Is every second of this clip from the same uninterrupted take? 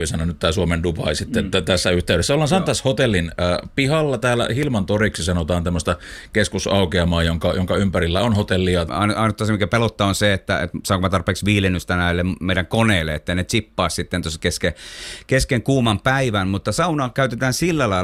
no; 1 cut; at 8.9 s

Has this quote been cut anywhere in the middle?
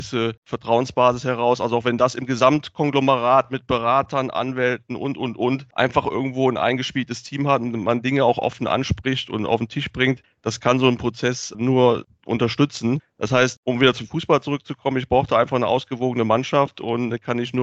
no; 0 cuts

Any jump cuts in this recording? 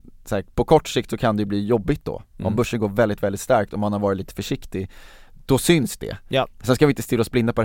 no; 0 cuts

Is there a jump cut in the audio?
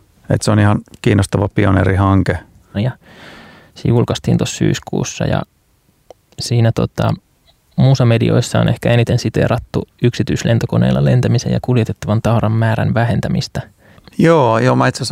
yes; 2 cuts; at 2.7 s, 14.1 s

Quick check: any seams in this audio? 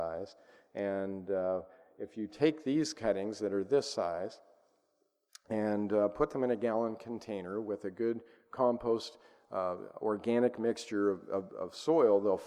no; 0 cuts

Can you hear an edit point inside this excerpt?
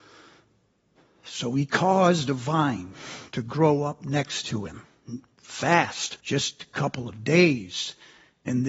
yes; 1 cut; at 6.2 s

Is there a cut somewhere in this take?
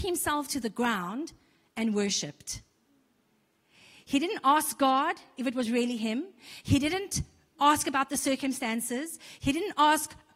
no; 0 cuts

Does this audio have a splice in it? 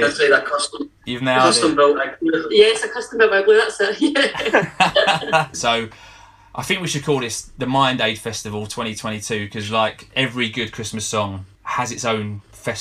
yes; 1 cut; at 5.5 s

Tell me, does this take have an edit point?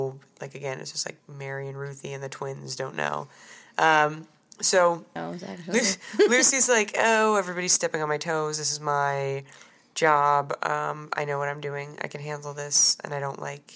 yes; 1 cut; at 5.2 s

